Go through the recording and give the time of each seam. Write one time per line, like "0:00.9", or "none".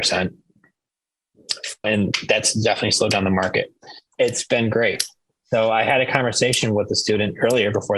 0:01.8
0:04.1